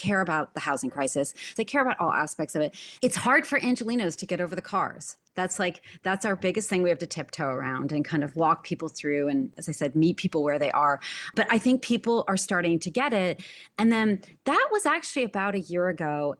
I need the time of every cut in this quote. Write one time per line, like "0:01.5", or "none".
0:01.6
0:03.0